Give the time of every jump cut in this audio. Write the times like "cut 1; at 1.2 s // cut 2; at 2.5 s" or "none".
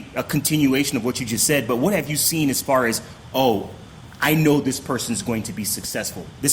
none